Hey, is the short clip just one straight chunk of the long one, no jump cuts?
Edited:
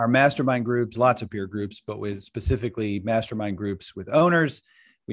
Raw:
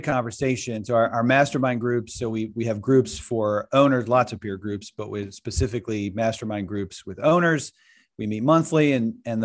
no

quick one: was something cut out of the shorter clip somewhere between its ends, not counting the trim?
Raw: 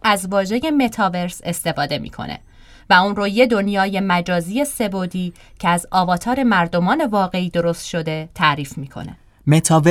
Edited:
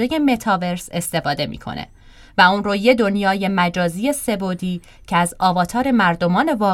no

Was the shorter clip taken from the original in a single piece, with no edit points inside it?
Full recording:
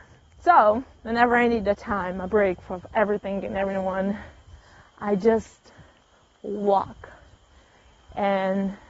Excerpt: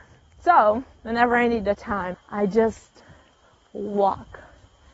no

